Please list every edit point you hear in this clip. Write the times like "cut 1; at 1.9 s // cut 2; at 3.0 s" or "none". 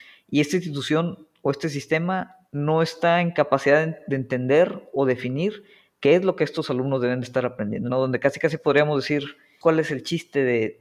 cut 1; at 7.9 s // cut 2; at 9.6 s